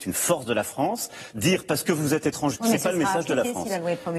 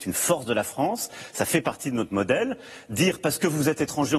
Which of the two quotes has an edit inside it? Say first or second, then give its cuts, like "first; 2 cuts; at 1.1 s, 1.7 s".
first; 2 cuts; at 1.3 s, 2.5 s